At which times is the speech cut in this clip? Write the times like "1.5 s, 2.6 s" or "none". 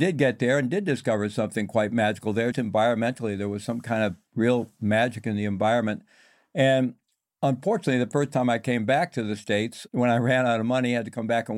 2.5 s